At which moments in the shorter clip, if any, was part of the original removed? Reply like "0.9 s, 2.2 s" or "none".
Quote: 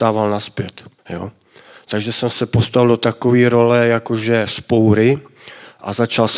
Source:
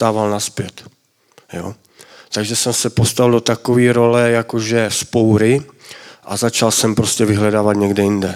1.0 s